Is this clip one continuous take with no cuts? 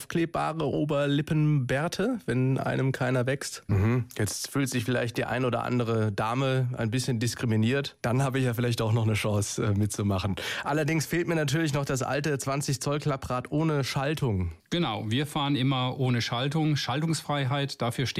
no; 2 cuts; at 3.7 s, 8.0 s

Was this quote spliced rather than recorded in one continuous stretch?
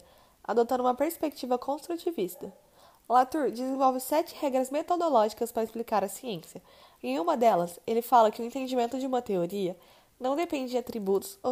no; 0 cuts

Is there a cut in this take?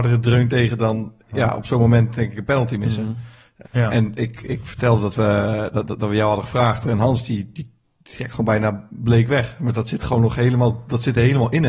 yes; 2 cuts; at 3.6 s, 6.8 s

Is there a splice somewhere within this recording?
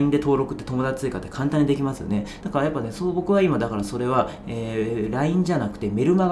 yes; 1 cut; at 2.4 s

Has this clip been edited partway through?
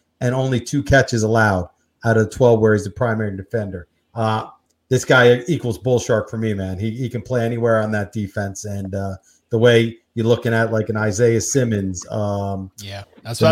no; 0 cuts

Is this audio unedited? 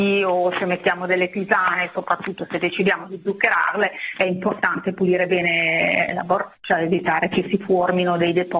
yes; 0 cuts

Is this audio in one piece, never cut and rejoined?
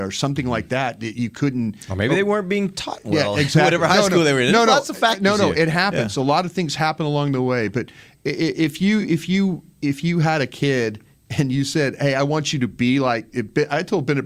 yes; 0 cuts

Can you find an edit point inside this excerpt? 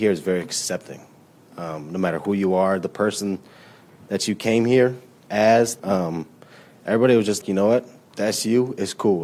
yes; 2 cuts; at 5.8 s, 7.4 s

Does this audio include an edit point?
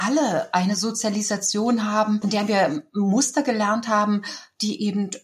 no; 0 cuts

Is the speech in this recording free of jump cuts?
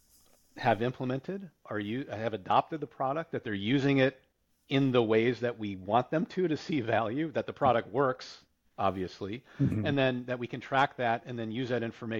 yes; 0 cuts

